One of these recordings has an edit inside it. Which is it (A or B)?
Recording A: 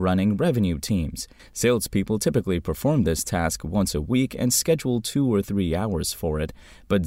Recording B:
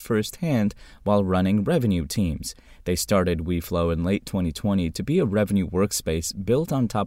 A